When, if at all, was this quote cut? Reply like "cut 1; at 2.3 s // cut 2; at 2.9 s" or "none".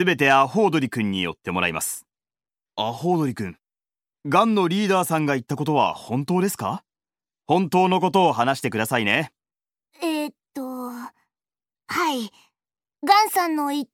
cut 1; at 2.7 s